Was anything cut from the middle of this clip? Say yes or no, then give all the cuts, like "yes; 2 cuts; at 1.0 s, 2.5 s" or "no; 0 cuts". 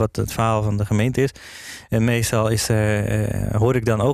no; 0 cuts